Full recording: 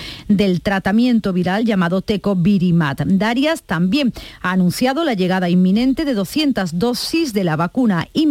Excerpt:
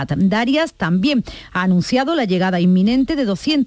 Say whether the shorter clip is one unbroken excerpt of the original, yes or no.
yes